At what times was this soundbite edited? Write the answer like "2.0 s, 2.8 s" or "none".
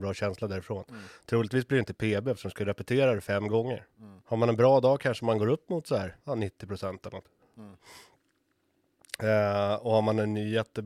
4.2 s, 6.2 s

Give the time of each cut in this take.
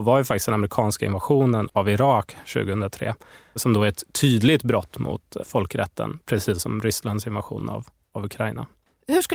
none

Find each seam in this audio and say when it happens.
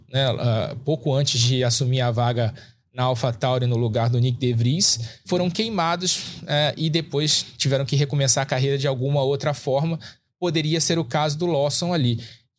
5.2 s

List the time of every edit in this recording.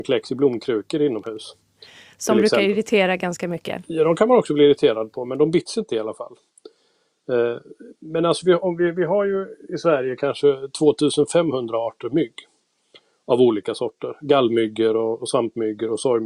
none

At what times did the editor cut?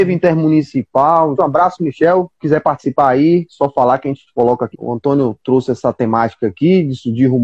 1.4 s, 4.7 s

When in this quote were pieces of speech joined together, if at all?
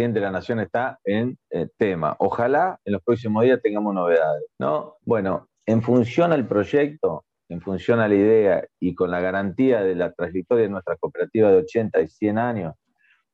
4.5 s

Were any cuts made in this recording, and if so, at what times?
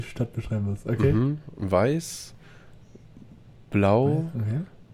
none

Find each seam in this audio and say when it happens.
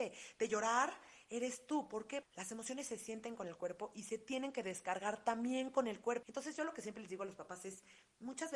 2.2 s, 6.2 s

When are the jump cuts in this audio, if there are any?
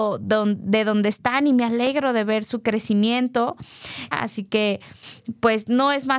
4.1 s

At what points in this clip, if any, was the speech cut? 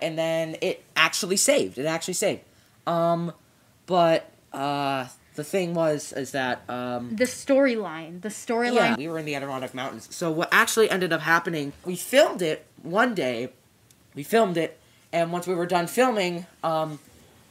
9.0 s, 11.8 s

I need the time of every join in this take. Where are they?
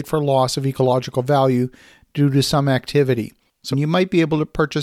3.7 s

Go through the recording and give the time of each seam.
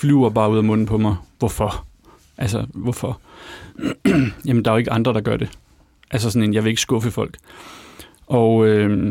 none

